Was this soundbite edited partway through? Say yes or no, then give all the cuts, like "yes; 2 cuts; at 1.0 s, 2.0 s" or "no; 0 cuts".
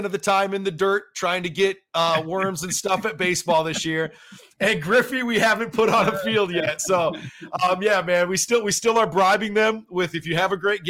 no; 0 cuts